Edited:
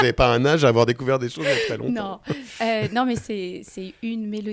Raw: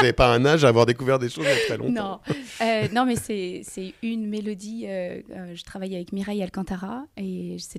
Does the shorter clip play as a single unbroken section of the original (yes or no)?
yes